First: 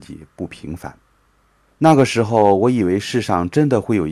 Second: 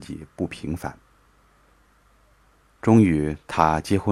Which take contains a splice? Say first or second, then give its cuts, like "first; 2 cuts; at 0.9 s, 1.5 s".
first; 1 cut; at 1.7 s